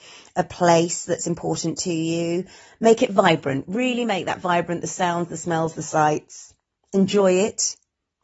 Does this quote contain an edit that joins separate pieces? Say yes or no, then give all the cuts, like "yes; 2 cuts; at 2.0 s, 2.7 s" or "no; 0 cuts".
no; 0 cuts